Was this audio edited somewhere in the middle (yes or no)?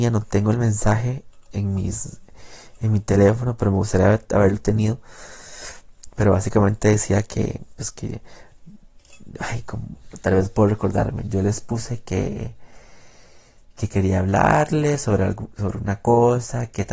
no